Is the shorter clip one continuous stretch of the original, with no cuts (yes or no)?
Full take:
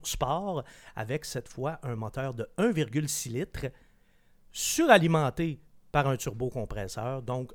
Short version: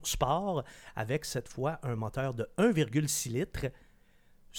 yes